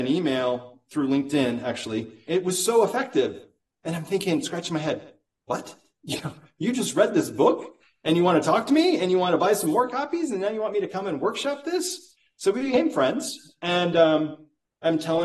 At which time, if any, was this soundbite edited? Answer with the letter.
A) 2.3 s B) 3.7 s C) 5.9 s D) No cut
A